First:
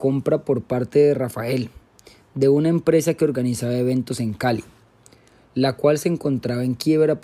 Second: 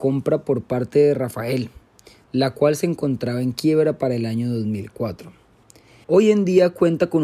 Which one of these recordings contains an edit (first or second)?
second